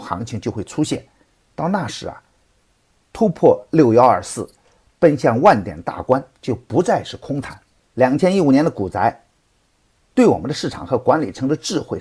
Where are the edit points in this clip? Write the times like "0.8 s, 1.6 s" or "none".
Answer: 7.8 s